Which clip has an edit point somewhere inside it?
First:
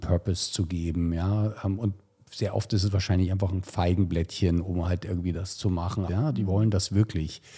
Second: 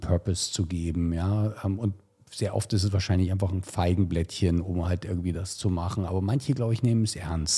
first; 1 cut; at 6.1 s

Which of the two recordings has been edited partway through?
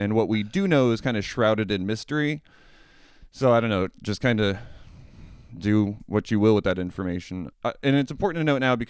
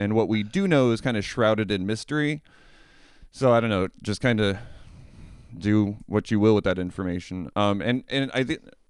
first; 1 cut; at 7.5 s

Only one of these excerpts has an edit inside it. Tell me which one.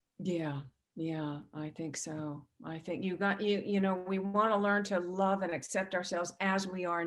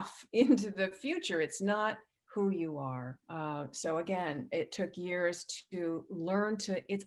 second; 1 cut; at 3.2 s

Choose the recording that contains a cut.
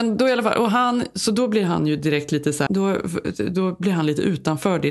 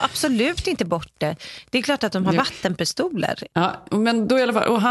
first; 1 cut; at 2.7 s

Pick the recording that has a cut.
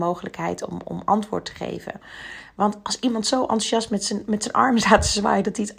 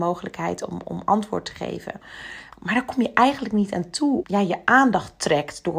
second; 2 cuts; at 2.5 s, 4.2 s

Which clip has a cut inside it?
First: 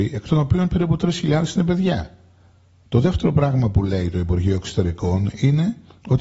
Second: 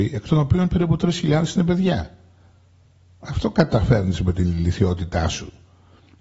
first; 1 cut; at 2.9 s

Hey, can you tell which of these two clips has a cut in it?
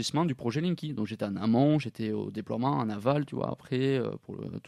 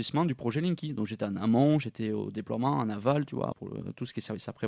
second; 1 cut; at 3.5 s

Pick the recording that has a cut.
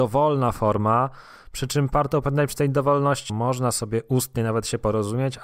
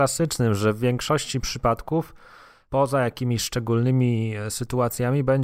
first; 1 cut; at 3.3 s

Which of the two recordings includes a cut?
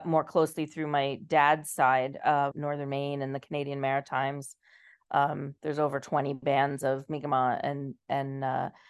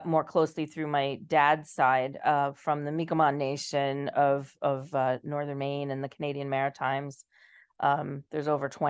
first; 1 cut; at 2.5 s

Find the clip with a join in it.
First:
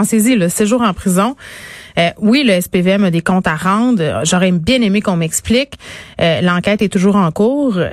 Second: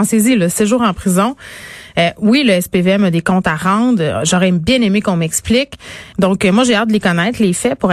second; 1 cut; at 6.1 s

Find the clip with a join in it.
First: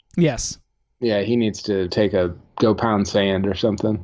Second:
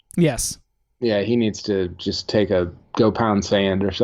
first; 1 cut; at 1.9 s

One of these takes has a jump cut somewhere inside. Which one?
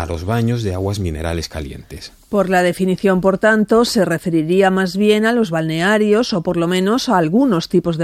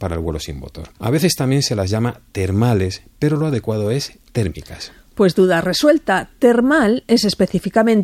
second; 1 cut; at 0.9 s

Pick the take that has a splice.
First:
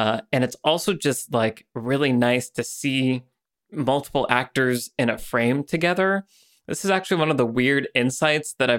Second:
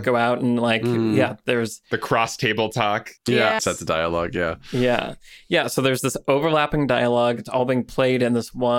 second; 1 cut; at 3.6 s

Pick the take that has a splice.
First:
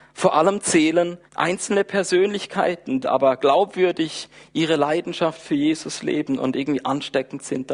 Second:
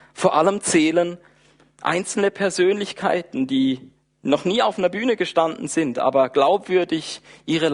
first; 2 cuts; at 1.3 s, 3.0 s

